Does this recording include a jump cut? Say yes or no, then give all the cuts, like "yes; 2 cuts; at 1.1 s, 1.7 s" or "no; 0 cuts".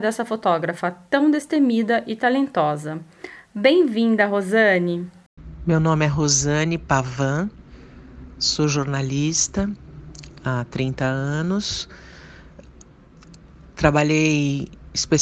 no; 0 cuts